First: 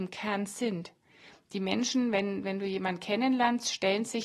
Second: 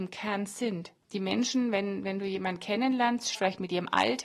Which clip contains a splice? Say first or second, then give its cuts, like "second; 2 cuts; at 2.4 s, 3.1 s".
second; 2 cuts; at 1.0 s, 3.3 s